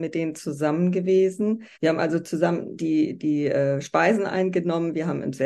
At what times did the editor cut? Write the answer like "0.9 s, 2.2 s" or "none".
1.7 s, 2.7 s